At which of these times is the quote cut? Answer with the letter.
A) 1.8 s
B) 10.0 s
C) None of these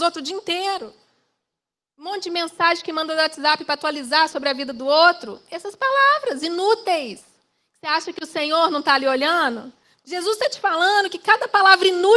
B